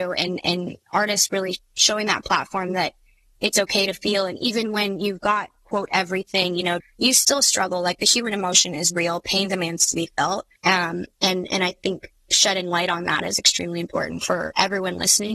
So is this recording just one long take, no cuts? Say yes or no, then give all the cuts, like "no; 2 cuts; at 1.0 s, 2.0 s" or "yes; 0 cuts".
no; 2 cuts; at 6.8 s, 10.6 s